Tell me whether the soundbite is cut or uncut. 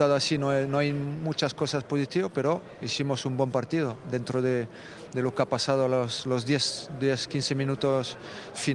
uncut